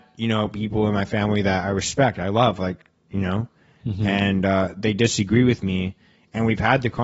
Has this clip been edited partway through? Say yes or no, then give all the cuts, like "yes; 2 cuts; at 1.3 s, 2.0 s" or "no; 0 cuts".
no; 0 cuts